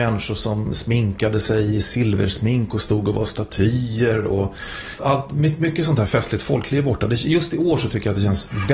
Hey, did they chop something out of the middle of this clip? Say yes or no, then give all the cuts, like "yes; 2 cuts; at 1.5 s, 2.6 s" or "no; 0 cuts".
yes; 1 cut; at 5.0 s